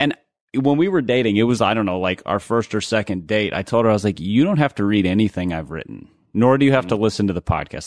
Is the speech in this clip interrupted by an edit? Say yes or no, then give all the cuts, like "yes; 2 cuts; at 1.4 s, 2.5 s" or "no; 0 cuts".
no; 0 cuts